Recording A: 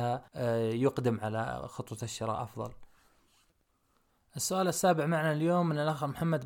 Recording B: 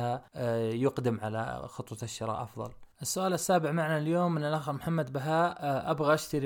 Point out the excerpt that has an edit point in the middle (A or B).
B